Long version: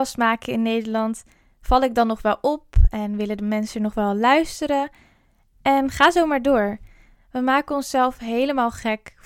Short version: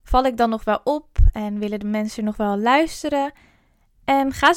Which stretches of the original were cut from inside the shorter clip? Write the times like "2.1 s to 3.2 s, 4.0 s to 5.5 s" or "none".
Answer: none